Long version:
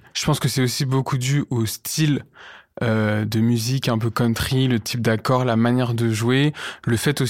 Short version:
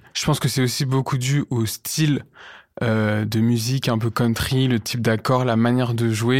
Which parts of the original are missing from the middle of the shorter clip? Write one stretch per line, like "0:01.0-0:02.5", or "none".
none

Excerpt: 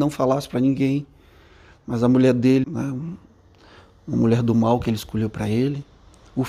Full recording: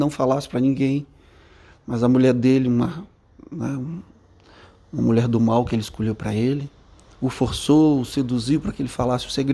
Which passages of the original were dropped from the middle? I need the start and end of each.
0:02.6-0:03.5

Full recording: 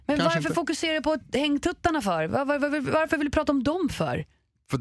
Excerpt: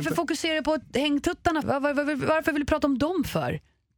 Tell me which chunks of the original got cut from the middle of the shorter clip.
0:02.0-0:02.3

